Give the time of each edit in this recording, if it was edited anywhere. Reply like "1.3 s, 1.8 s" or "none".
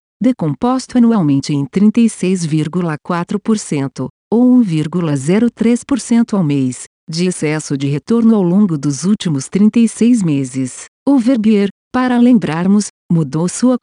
11.0 s

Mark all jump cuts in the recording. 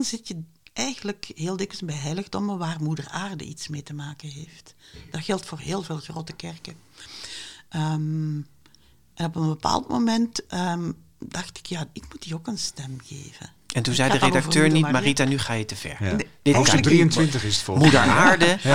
none

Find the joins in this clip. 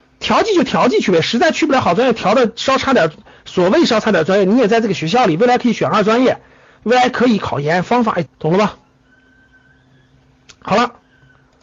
8.3 s

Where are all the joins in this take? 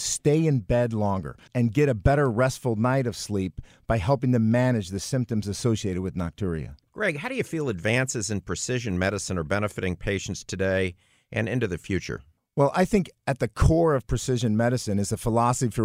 1.5 s

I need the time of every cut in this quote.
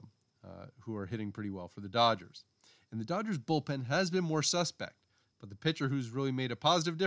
none

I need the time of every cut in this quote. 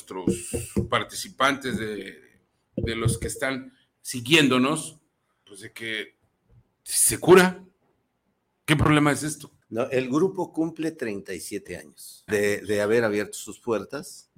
9.6 s, 12.3 s

